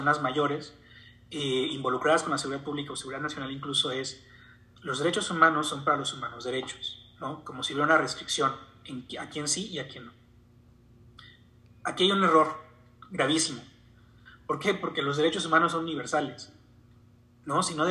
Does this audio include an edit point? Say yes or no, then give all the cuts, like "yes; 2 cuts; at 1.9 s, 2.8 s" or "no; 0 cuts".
no; 0 cuts